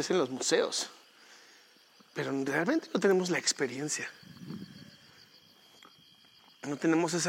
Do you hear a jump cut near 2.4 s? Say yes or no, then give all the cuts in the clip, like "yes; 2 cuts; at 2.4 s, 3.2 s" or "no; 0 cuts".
no; 0 cuts